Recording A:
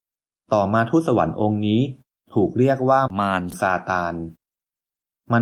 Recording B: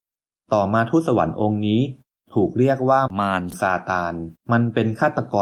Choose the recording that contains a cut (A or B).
B